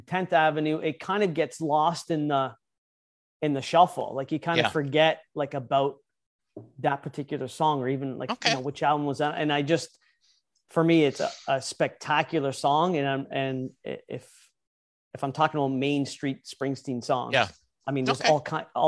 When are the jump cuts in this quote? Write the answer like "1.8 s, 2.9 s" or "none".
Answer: 11.2 s